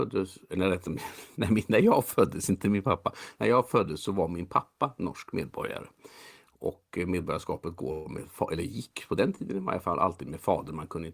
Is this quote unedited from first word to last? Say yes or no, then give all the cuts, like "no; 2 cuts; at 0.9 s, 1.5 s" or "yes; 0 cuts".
yes; 0 cuts